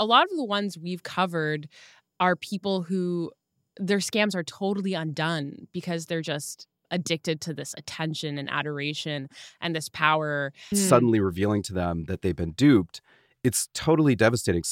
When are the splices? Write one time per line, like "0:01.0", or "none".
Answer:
0:10.7